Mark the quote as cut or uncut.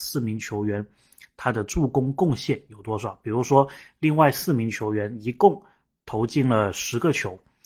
uncut